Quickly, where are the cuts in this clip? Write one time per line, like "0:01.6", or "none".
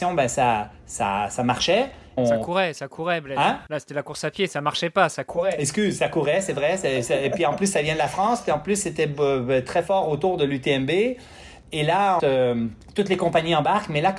0:02.2
0:12.2